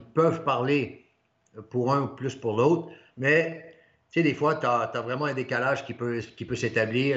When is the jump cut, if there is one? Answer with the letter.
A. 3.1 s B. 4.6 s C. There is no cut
A